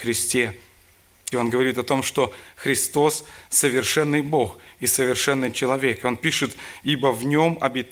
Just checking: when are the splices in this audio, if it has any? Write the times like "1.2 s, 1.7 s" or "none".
1.3 s